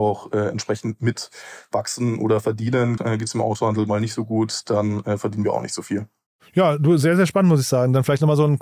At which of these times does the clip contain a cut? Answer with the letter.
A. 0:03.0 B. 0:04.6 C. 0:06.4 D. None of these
A